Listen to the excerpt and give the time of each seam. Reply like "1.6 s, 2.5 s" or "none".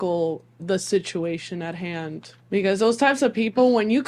2.4 s